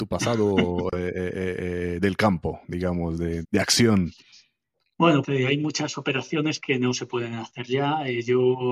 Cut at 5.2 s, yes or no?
yes